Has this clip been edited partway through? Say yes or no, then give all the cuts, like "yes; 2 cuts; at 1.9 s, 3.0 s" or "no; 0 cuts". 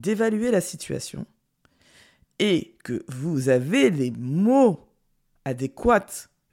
no; 0 cuts